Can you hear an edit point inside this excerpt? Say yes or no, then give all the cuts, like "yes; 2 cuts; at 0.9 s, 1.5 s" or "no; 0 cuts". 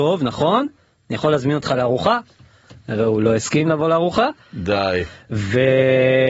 no; 0 cuts